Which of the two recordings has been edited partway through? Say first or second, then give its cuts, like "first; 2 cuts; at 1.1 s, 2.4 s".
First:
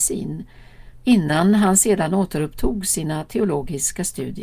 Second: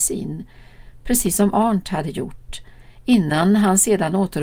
first; 1 cut; at 1.0 s